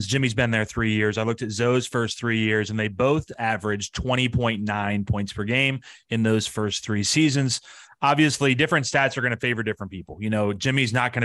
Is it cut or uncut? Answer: uncut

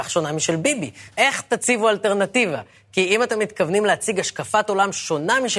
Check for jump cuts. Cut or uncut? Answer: cut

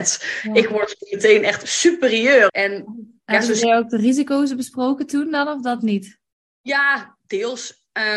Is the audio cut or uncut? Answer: cut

